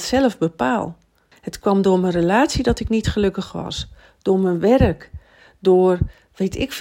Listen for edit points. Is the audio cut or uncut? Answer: cut